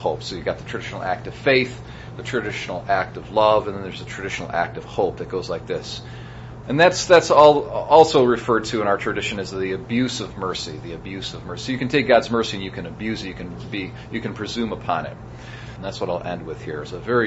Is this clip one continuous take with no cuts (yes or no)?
no